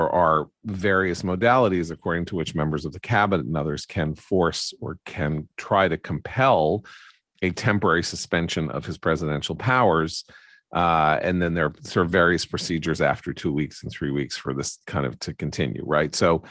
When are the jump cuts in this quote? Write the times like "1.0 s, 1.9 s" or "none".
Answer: none